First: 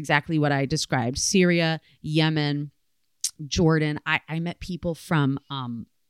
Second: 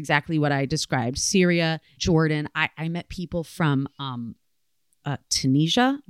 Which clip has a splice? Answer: second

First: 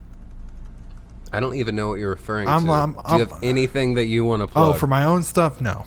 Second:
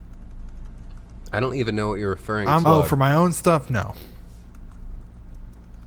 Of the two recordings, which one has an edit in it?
second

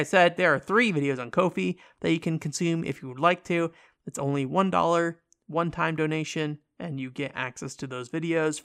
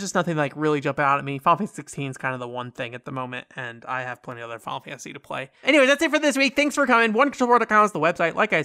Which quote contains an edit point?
second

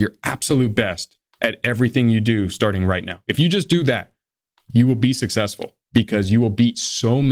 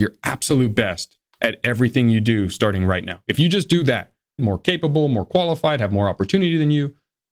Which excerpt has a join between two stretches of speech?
second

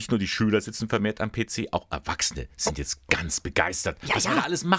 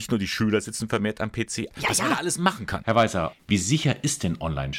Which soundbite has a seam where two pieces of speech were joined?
second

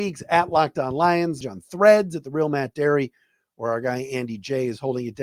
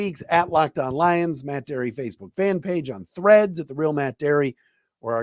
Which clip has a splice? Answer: first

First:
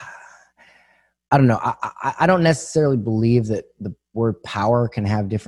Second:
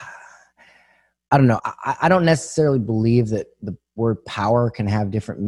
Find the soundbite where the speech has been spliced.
second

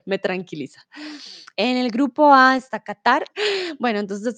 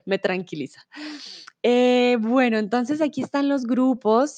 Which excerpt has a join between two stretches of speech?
first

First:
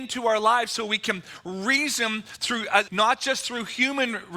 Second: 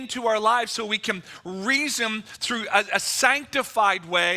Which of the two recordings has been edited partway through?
first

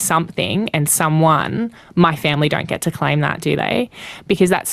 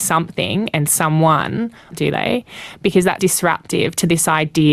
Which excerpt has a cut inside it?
second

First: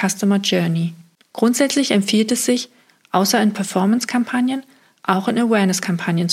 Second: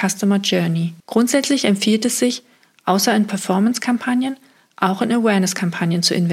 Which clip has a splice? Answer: second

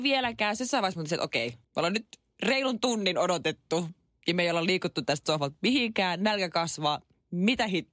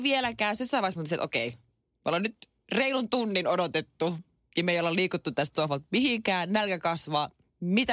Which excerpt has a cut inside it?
first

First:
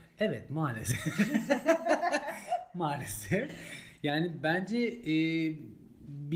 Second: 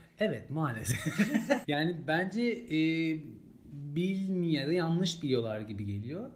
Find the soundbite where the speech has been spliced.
second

